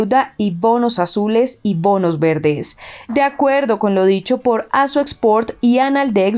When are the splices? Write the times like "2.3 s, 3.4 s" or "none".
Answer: 3.1 s